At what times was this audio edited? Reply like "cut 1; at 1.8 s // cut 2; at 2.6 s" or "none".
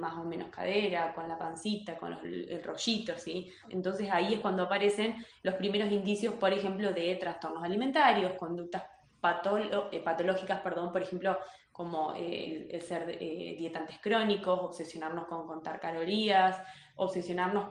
cut 1; at 3.6 s